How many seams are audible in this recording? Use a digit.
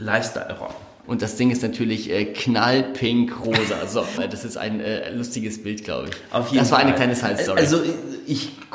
2